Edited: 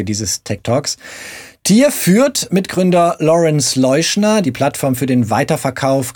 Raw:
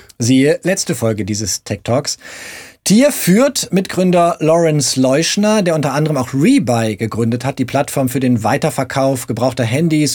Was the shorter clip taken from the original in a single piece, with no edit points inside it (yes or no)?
no